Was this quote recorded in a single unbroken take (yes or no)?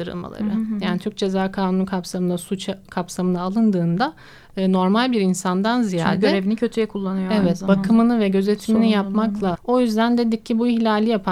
no